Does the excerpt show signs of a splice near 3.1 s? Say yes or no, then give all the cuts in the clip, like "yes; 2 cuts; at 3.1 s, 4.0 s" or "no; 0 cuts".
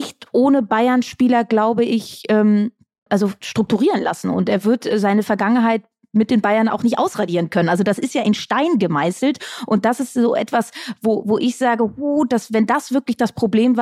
yes; 1 cut; at 3.1 s